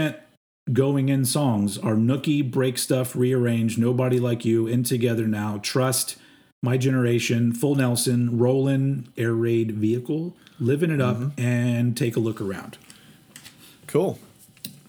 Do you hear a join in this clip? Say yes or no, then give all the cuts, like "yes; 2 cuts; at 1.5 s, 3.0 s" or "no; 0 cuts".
no; 0 cuts